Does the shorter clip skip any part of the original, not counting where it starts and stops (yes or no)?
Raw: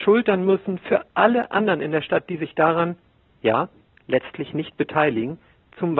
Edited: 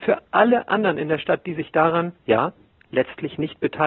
yes